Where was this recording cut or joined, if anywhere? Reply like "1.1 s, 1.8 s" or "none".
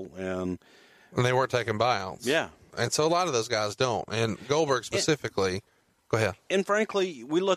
2.7 s